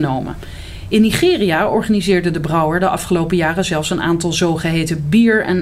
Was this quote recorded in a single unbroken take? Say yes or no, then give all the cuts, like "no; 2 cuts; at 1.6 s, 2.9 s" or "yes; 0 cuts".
yes; 0 cuts